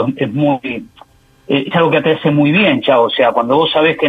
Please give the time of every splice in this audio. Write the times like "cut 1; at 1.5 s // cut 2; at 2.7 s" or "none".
cut 1; at 1.7 s